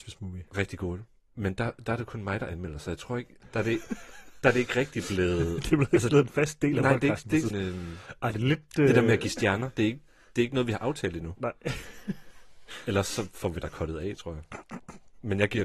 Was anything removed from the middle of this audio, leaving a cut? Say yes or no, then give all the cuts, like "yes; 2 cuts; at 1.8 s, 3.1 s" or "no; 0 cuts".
yes; 1 cut; at 7.5 s